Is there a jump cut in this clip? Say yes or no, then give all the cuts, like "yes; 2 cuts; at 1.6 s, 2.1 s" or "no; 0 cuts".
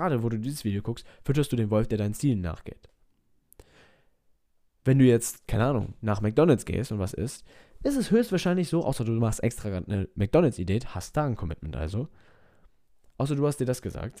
no; 0 cuts